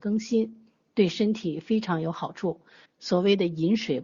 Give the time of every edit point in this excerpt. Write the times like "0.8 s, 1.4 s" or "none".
2.9 s